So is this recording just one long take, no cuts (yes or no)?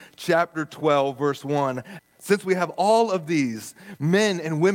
no